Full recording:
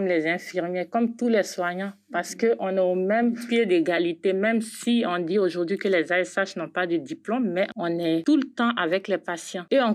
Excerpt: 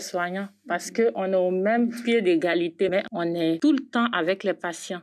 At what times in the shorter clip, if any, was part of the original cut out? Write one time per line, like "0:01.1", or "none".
0:02.9